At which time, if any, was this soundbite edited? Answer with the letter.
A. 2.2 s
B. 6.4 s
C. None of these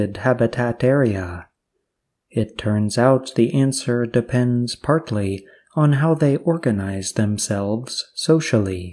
C